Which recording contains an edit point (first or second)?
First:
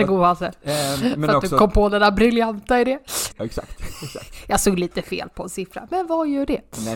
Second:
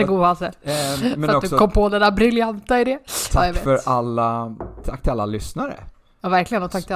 first